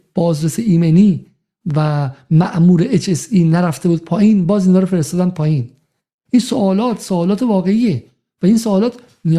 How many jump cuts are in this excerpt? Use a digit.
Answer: 0